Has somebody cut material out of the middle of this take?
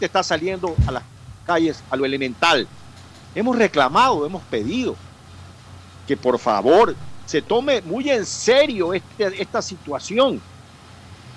yes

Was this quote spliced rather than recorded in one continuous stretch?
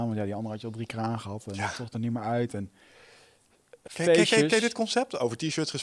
yes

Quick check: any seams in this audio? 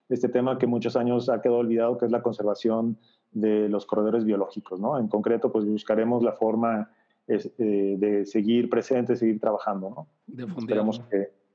no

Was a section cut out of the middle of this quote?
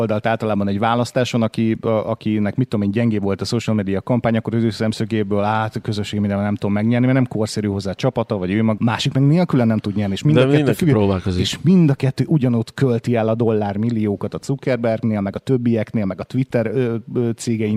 yes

